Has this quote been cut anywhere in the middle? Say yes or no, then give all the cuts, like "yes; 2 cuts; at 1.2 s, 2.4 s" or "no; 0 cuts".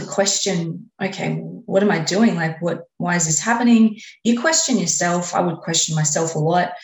no; 0 cuts